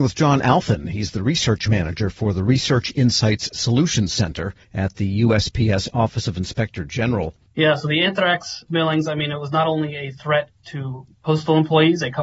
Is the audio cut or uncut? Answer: cut